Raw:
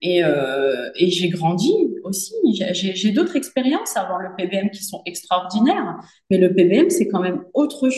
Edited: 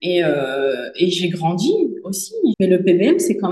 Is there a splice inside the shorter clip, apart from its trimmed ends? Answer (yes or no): yes